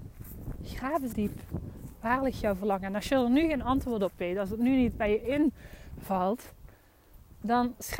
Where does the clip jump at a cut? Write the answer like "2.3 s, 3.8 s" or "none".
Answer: 1.1 s